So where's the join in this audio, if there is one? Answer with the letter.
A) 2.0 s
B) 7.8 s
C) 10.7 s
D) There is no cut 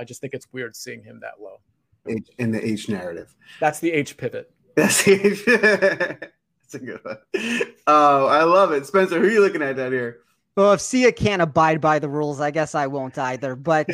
A